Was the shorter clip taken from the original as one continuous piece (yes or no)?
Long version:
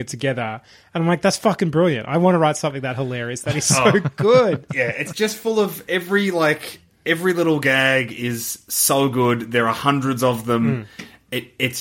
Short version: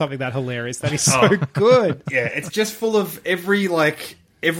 yes